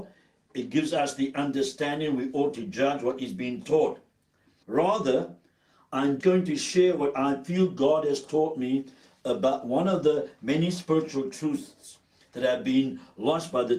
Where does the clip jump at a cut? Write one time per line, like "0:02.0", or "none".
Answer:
0:04.6
0:06.2